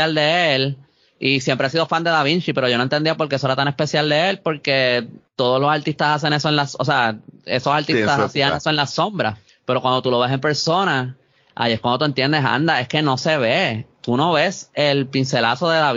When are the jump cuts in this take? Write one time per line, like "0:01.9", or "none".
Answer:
none